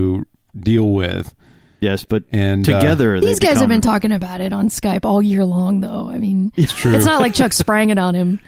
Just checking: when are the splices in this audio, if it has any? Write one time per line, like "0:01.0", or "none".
none